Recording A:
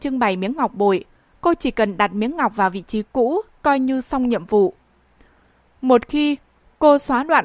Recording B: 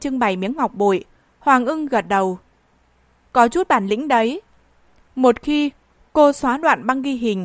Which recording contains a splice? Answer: B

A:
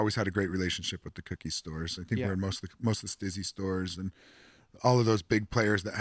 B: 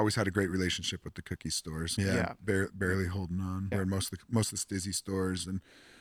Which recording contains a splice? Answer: B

